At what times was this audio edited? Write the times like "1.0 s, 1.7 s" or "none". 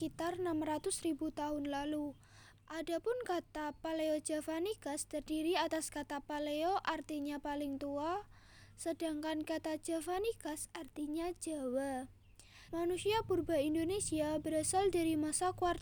2.6 s, 12.7 s